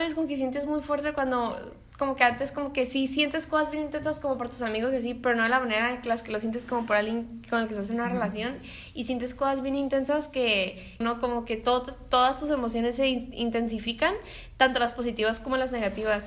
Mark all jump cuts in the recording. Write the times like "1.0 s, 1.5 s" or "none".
11.0 s